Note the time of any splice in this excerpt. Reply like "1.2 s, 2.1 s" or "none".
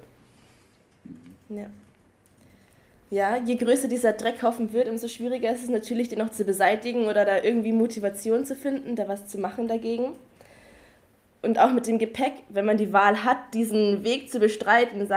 none